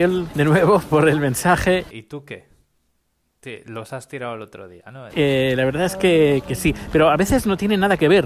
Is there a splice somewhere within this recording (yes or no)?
yes